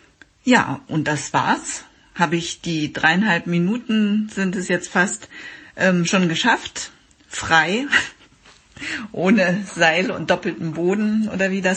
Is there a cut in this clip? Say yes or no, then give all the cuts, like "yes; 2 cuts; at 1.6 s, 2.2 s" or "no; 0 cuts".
no; 0 cuts